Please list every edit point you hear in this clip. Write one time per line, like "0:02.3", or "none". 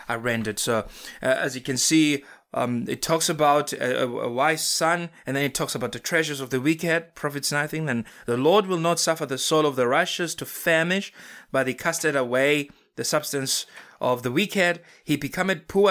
none